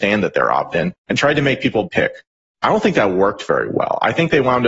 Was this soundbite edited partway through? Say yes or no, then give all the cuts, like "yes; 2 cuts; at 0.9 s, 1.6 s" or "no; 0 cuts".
yes; 1 cut; at 1.8 s